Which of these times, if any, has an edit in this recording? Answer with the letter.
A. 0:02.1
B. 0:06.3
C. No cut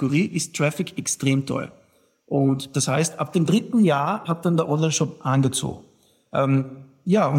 C